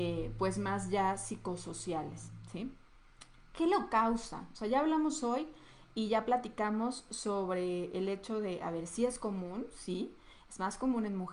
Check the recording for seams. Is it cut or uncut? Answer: uncut